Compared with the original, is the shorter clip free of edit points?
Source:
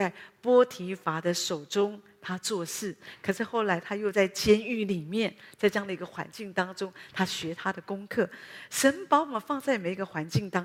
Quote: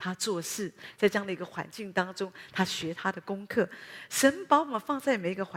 no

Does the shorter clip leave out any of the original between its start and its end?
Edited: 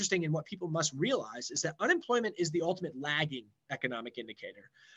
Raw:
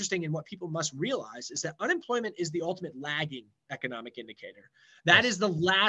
no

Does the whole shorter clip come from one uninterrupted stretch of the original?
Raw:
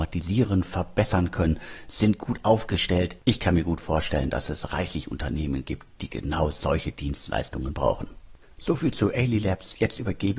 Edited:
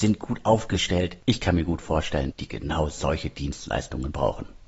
no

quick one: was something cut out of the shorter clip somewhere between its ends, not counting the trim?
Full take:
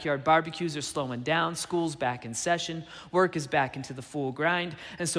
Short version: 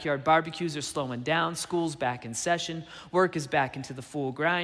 no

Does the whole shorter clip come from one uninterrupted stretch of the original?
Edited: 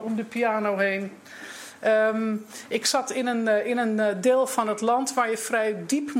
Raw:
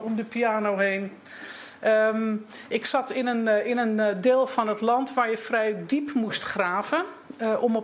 yes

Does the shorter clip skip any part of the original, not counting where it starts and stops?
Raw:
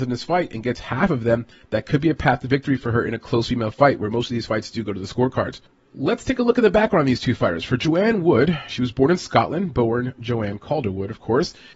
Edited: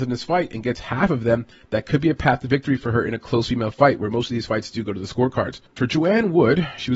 yes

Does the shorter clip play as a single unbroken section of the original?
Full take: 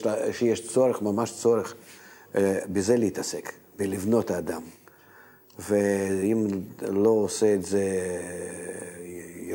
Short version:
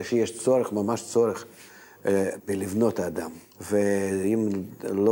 no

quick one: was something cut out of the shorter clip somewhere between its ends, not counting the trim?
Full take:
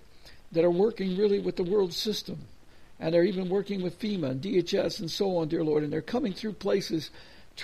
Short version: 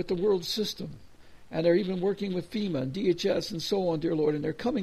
no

